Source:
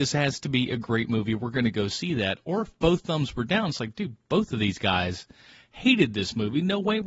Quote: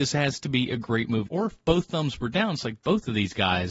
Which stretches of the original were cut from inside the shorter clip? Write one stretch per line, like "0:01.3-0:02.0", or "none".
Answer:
0:01.3-0:02.4
0:03.9-0:04.2